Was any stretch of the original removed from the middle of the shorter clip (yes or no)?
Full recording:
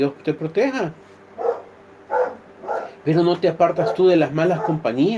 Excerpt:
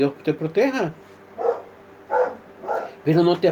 no